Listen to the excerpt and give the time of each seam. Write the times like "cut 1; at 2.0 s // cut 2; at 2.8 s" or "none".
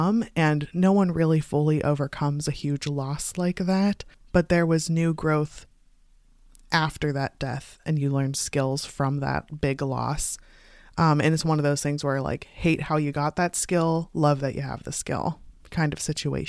cut 1; at 7.8 s